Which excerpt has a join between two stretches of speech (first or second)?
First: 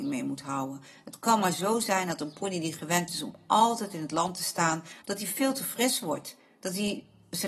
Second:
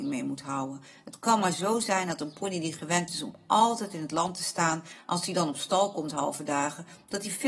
first